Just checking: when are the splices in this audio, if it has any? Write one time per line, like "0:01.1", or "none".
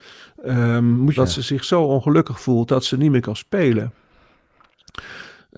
0:01.2